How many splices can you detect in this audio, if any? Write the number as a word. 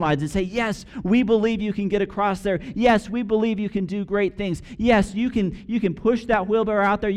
zero